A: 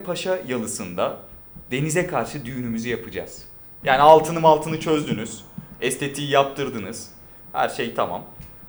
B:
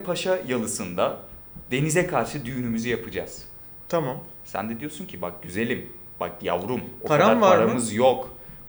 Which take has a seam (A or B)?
A